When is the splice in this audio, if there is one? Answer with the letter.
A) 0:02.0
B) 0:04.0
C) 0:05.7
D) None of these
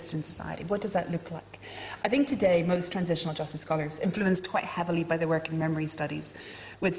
A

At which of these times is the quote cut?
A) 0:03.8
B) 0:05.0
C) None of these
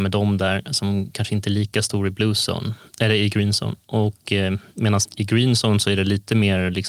B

